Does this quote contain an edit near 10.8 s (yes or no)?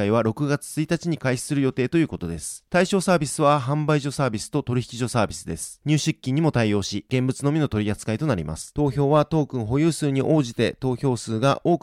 no